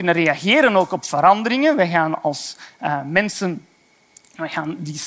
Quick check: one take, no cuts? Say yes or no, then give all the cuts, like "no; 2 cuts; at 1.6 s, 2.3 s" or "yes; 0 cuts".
yes; 0 cuts